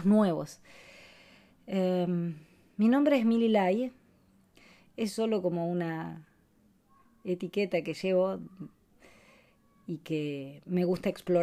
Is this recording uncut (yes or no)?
yes